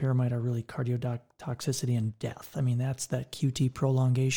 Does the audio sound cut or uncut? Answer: uncut